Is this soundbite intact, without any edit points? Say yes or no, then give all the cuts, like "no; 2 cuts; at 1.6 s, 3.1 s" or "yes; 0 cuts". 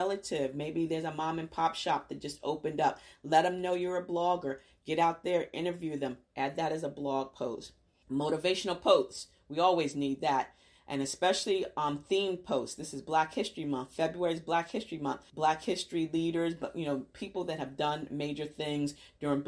no; 2 cuts; at 8.0 s, 15.3 s